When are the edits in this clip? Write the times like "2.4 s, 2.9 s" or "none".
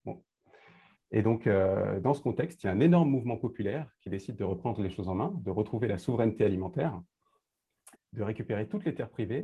1.0 s, 7.9 s